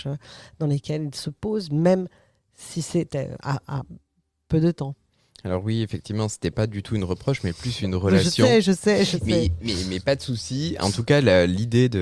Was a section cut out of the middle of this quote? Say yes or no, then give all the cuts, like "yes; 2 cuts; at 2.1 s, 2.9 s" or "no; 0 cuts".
no; 0 cuts